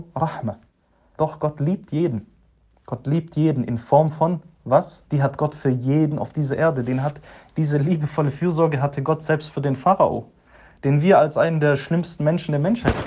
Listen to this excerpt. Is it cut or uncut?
cut